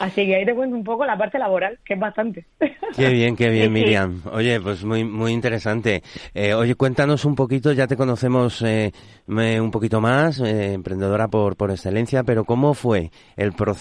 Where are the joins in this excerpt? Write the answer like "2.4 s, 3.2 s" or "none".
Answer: none